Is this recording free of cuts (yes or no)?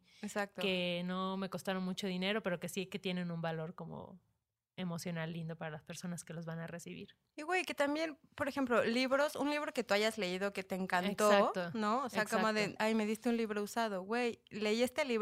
no